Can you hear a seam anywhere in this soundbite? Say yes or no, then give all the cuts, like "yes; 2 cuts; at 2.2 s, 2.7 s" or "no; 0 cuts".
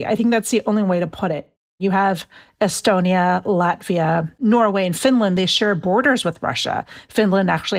no; 0 cuts